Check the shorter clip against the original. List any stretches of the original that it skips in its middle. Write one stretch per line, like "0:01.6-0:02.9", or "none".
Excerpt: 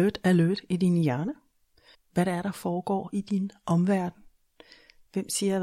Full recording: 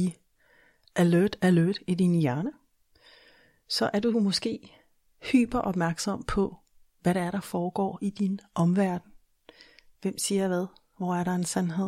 0:03.1-0:06.8